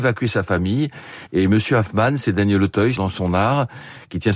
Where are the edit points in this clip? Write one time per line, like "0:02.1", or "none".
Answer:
0:01.3
0:03.0